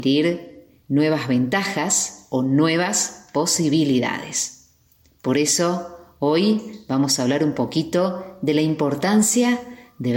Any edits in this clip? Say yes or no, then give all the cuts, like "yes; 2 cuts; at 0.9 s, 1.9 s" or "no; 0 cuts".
no; 0 cuts